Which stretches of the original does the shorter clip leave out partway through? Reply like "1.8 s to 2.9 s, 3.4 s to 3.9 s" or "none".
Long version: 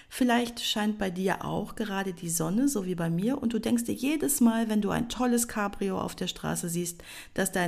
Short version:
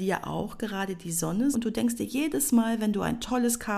2.7 s to 3.4 s